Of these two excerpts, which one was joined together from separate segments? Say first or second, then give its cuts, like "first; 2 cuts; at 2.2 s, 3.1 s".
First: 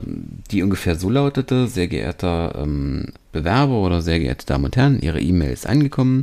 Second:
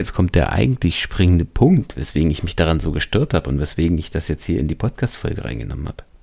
first; 1 cut; at 3.1 s